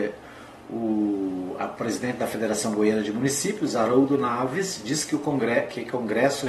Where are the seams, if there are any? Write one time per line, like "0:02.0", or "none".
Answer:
none